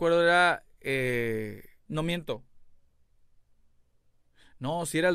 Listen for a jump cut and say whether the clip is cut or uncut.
cut